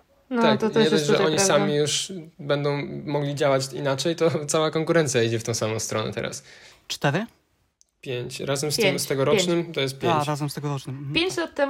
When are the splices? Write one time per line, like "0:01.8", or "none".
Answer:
0:06.7